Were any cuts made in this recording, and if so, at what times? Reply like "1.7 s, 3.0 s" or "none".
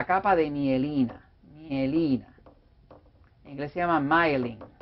none

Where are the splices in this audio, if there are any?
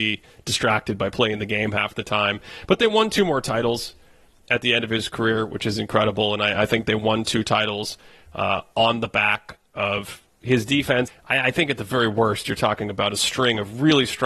11.1 s

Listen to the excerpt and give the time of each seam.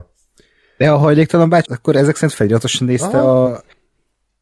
1.7 s

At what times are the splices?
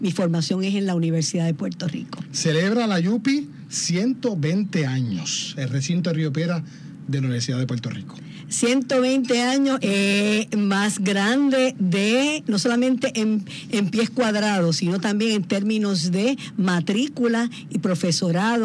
9.8 s

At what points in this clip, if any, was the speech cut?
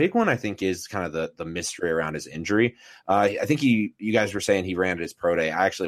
none

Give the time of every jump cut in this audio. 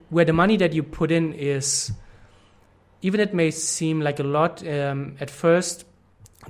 none

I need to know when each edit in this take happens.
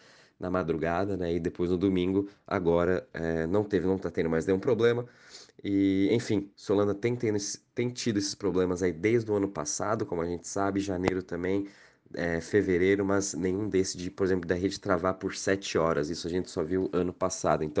none

